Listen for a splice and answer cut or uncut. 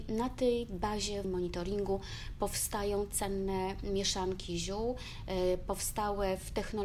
cut